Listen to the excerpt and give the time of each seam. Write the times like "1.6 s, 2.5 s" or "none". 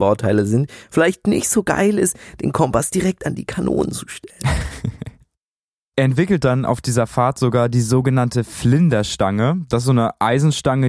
none